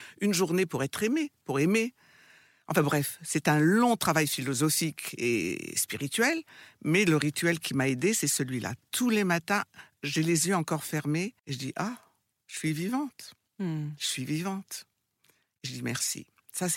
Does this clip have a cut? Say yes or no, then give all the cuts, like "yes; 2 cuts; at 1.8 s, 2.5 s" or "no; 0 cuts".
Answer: yes; 1 cut; at 11.4 s